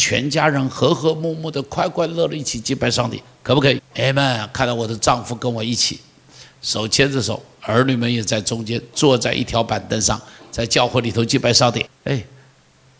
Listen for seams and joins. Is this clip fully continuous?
no; 2 cuts; at 3.8 s, 11.9 s

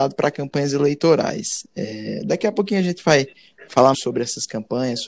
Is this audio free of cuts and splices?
no; 1 cut; at 3.9 s

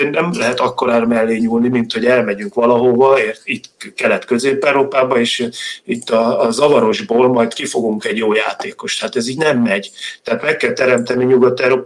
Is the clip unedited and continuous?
yes; 0 cuts

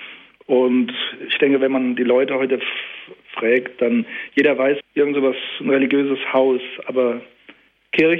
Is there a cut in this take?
yes; 1 cut; at 4.8 s

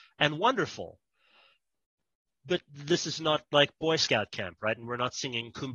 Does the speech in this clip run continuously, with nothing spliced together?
yes; 0 cuts

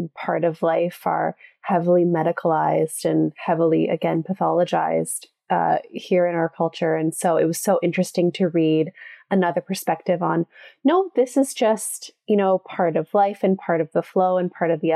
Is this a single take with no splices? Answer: yes; 0 cuts

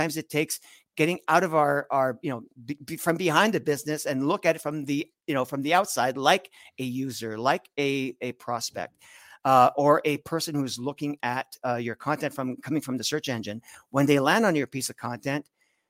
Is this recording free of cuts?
yes; 0 cuts

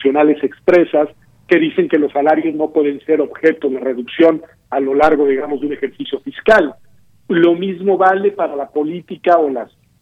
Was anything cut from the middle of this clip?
no; 0 cuts

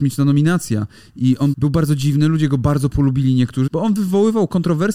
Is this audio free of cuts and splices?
no; 2 cuts; at 1.5 s, 3.7 s

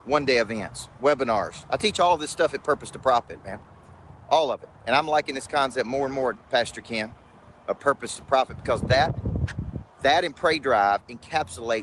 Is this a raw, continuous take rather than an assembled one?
yes; 0 cuts

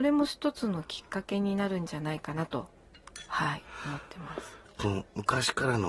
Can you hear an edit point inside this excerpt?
yes; 1 cut; at 4.7 s

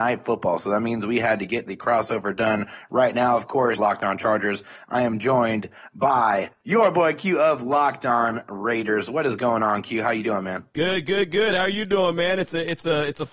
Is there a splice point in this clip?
yes; 1 cut; at 3.8 s

